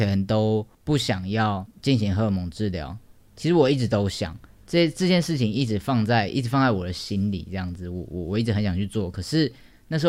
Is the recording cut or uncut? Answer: uncut